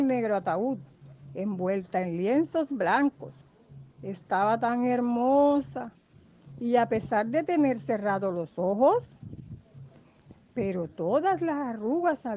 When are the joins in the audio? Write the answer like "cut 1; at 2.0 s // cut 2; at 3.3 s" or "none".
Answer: none